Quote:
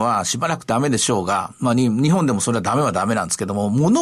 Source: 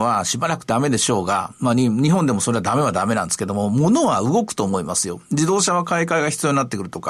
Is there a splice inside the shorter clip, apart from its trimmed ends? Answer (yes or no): no